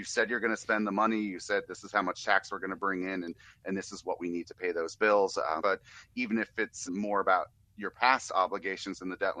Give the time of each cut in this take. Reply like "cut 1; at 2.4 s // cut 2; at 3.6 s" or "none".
cut 1; at 5.6 s // cut 2; at 6.9 s

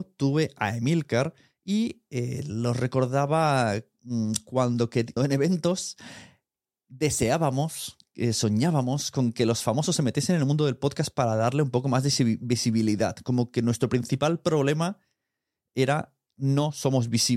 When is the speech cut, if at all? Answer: cut 1; at 5.2 s

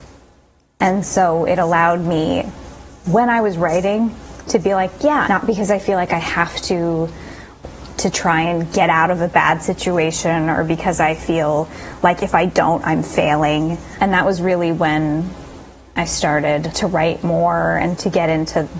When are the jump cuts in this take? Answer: cut 1; at 5.2 s

